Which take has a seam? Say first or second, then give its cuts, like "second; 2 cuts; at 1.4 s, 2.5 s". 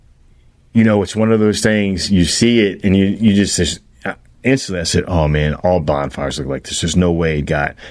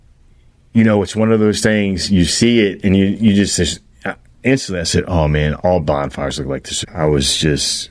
second; 1 cut; at 6.8 s